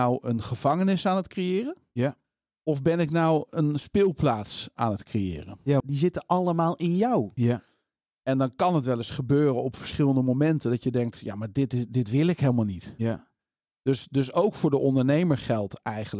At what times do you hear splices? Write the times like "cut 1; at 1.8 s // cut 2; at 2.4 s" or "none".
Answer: cut 1; at 5.8 s // cut 2; at 7.4 s